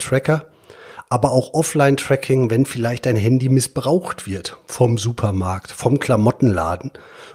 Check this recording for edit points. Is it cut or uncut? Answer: uncut